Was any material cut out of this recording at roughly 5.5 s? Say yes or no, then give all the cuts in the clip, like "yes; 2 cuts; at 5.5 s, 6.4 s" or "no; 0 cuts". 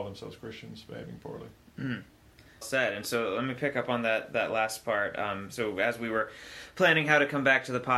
no; 1 cut; at 2.6 s